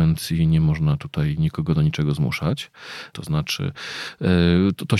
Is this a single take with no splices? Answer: no; 1 cut; at 3.1 s

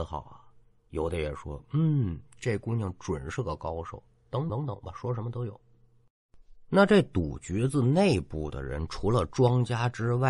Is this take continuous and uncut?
no; 1 cut; at 4.5 s

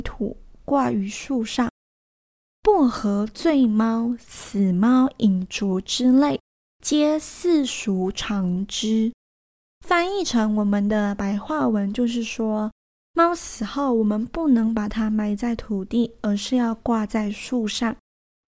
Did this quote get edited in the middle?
no; 0 cuts

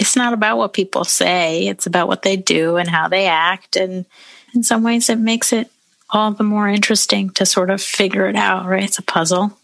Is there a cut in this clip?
yes; 1 cut; at 4.5 s

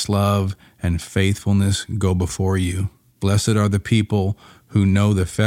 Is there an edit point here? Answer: no; 0 cuts

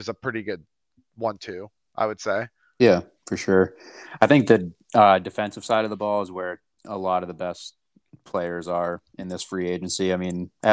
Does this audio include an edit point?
no; 0 cuts

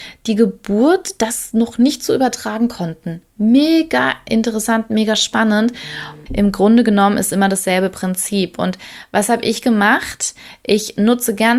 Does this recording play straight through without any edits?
no; 1 cut; at 6.3 s

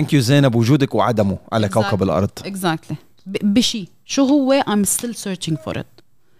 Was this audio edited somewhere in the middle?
no; 0 cuts

